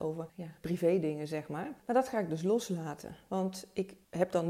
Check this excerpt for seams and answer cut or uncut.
uncut